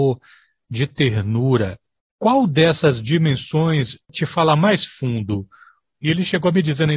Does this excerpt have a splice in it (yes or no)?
yes